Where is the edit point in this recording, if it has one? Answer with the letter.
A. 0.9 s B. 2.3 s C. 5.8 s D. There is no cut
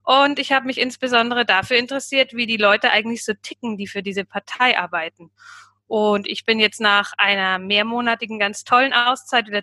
D